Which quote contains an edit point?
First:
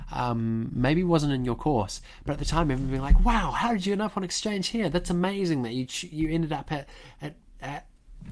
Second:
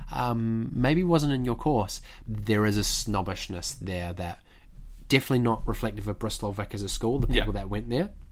second; 1 cut; at 2.2 s

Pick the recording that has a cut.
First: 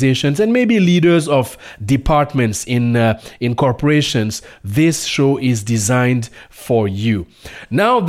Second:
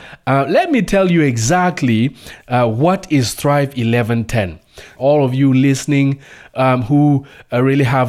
second; 1 cut; at 5.0 s

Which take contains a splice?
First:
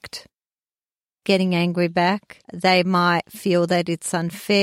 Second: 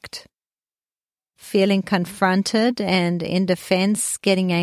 first; 2 cuts; at 1.2 s, 2.4 s

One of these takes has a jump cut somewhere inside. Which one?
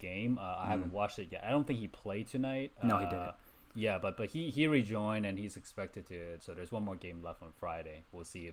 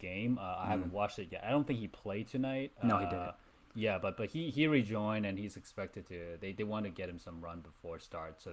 first; 1 cut; at 6.4 s

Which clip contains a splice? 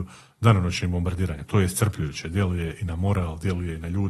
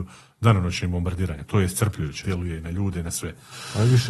second; 1 cut; at 2.2 s

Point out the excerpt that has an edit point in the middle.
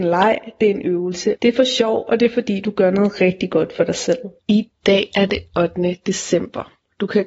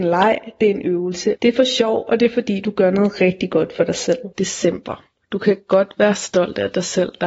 second; 1 cut; at 4.3 s

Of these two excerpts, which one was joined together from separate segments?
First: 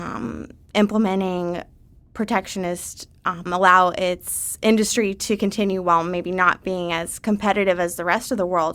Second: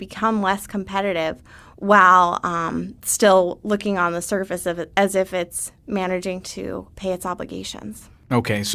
first; 1 cut; at 3.5 s

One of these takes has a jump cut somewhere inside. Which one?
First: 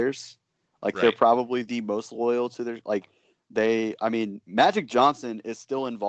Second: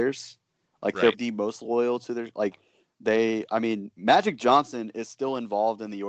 second; 1 cut; at 1.1 s

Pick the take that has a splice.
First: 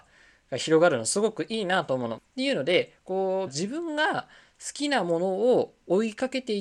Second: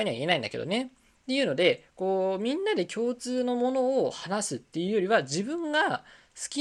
first; 2 cuts; at 2.2 s, 3.5 s

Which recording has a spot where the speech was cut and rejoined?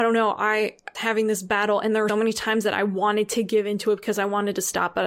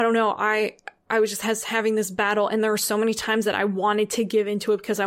first; 2 cuts; at 0.9 s, 2.1 s

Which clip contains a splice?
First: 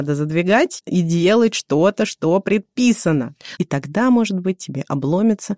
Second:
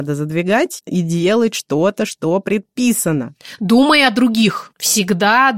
first; 1 cut; at 3.6 s

